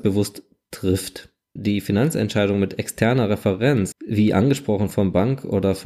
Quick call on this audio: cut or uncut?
cut